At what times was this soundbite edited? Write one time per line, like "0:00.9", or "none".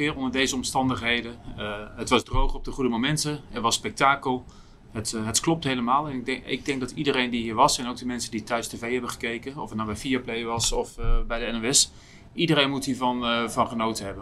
none